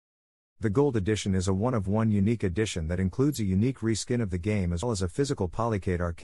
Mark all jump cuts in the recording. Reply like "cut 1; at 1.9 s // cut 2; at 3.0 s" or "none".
cut 1; at 4.8 s